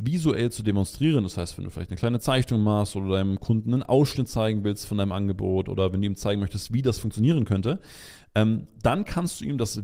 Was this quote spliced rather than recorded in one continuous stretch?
no; 0 cuts

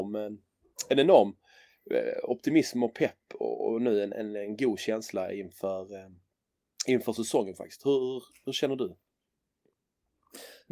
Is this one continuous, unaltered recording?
yes; 0 cuts

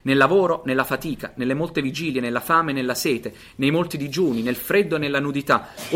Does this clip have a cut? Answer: no; 0 cuts

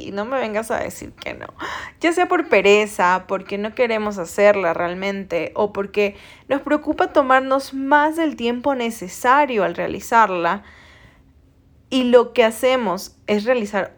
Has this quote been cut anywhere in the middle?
no; 0 cuts

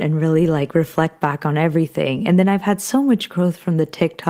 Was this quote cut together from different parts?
no; 0 cuts

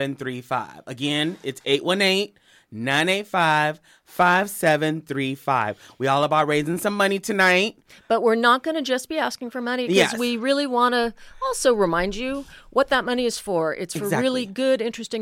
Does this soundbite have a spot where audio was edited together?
no; 0 cuts

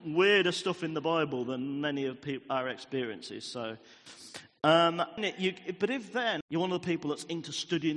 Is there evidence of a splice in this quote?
yes; 2 cuts; at 5.2 s, 6.4 s

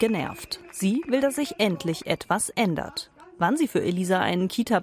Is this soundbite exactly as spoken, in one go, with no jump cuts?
yes; 0 cuts

